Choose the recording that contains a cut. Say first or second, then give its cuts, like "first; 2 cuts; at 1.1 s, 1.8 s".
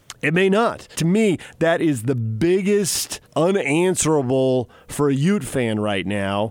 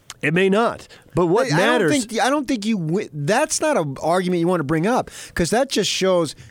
first; 2 cuts; at 0.9 s, 3.3 s